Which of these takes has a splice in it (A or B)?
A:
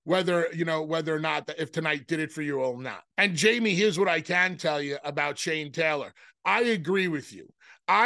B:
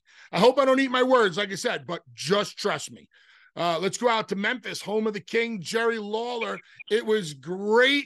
A